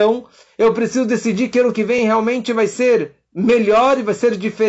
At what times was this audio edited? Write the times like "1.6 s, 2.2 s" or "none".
none